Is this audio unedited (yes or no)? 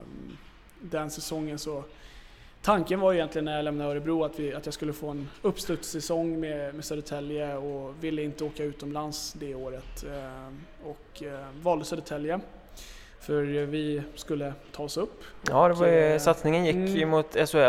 yes